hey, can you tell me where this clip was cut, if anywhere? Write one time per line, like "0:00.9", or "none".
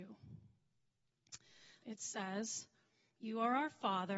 0:01.8